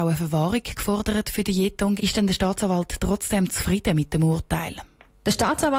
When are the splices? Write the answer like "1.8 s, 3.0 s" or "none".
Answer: 2.0 s